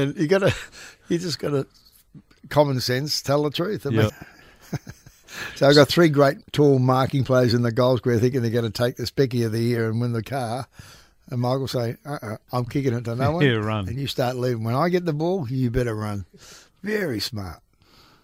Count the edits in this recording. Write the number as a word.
one